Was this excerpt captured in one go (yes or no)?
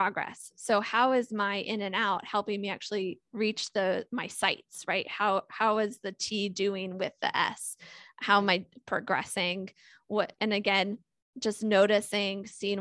no